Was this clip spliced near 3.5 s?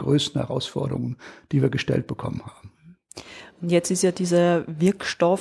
no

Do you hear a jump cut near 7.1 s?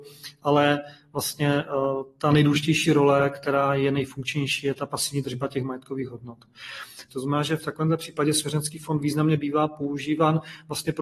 yes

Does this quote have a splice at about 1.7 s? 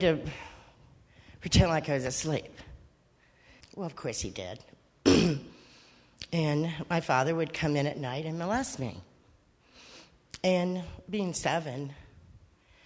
no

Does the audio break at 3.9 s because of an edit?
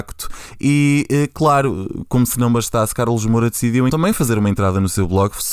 yes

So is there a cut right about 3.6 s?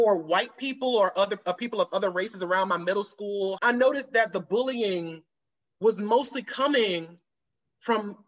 yes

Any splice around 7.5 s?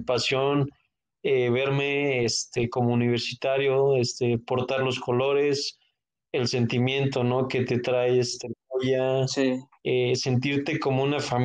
no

